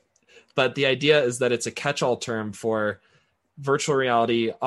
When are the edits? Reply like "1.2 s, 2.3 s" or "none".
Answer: none